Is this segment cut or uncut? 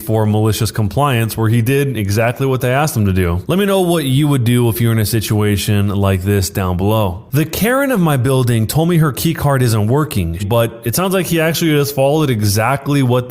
cut